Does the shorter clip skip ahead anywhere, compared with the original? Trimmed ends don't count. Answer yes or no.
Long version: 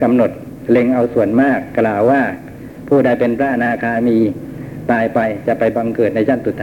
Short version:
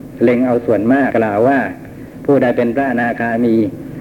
yes